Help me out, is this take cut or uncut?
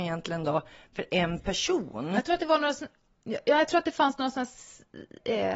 uncut